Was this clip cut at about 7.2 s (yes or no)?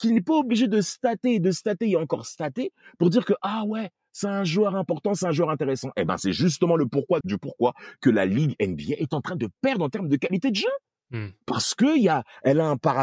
yes